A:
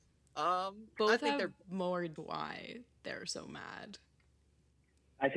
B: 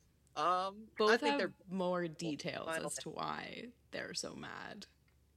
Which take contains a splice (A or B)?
A